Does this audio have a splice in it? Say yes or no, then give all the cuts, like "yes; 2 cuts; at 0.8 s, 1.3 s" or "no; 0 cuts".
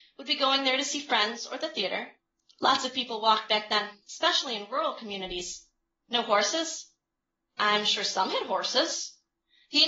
no; 0 cuts